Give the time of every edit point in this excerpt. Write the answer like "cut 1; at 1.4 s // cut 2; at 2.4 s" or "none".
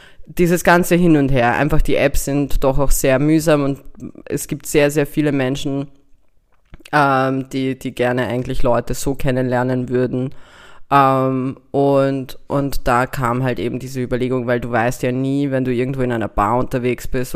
none